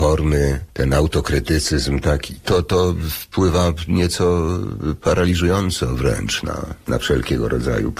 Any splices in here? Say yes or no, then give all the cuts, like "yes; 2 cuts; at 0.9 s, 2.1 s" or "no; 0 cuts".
no; 0 cuts